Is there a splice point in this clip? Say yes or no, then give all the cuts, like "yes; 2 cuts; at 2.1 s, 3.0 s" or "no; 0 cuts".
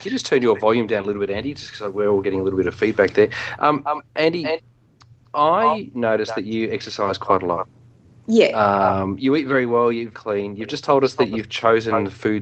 yes; 1 cut; at 10.1 s